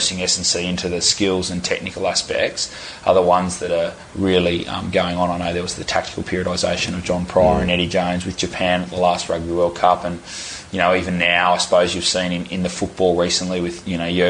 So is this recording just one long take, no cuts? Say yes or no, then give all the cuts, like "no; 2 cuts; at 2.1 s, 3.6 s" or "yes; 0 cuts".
yes; 0 cuts